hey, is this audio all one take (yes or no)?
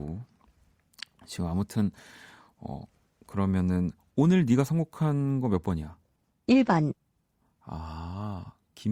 yes